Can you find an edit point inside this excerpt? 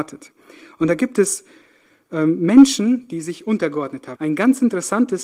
yes; 1 cut; at 4.2 s

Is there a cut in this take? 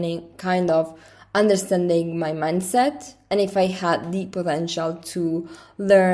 no; 0 cuts

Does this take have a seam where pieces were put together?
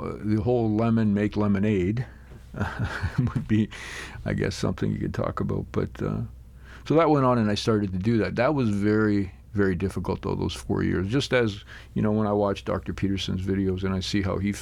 no; 0 cuts

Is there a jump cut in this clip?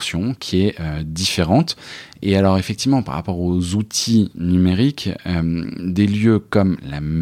no; 0 cuts

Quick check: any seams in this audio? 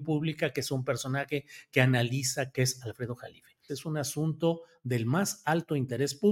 yes; 2 cuts; at 2.5 s, 3.7 s

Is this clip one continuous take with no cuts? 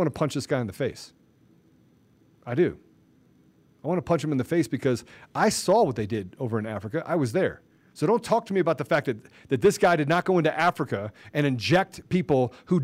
yes; 0 cuts

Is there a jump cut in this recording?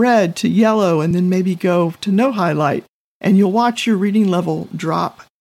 no; 0 cuts

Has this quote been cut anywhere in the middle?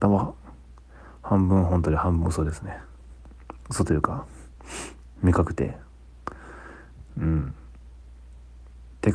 no; 0 cuts

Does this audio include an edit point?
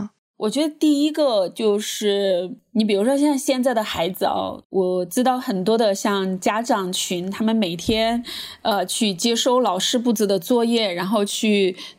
no; 0 cuts

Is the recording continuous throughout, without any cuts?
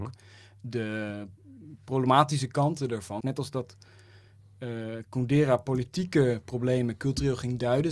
no; 1 cut; at 3.2 s

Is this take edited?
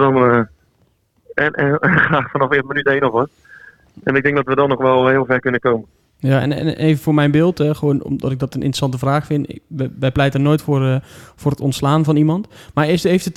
no; 0 cuts

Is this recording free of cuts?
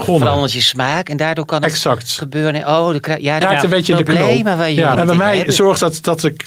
no; 2 cuts; at 3.4 s, 4.9 s

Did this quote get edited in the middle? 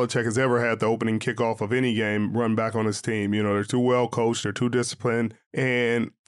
no; 0 cuts

